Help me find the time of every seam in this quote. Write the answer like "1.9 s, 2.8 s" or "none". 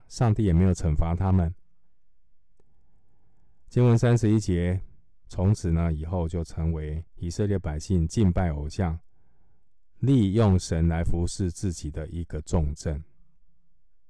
5.2 s, 7.1 s